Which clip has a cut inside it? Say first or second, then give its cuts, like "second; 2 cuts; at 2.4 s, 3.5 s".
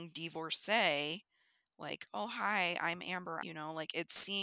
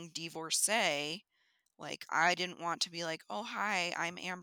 first; 2 cuts; at 2.1 s, 3.4 s